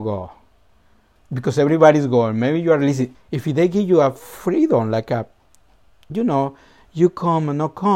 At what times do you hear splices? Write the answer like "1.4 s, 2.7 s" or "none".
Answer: 1.2 s, 3.1 s

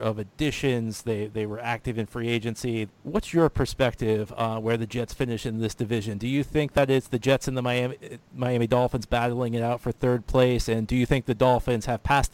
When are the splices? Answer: 2.9 s

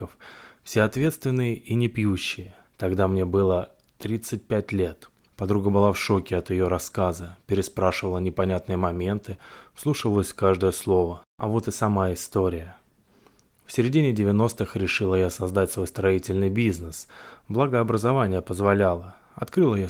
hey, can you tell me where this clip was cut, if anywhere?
2.6 s, 5.3 s, 11.2 s

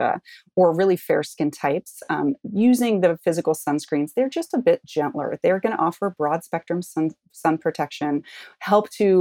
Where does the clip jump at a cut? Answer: none

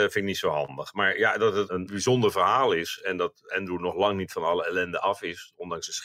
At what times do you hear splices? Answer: none

